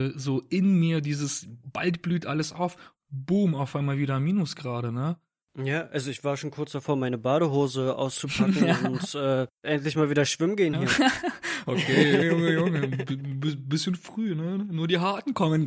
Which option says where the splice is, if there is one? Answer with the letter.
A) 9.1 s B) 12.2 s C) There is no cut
B